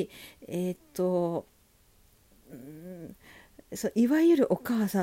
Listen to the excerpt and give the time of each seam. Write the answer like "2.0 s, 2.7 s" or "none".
none